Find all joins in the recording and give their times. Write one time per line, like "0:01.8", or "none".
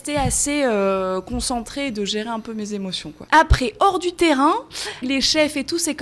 0:03.3
0:05.0